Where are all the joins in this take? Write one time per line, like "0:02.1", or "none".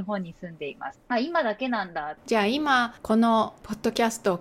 0:02.2